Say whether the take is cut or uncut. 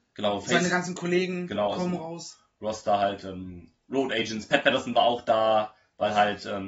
uncut